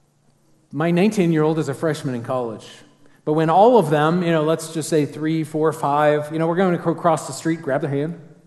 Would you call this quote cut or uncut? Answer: uncut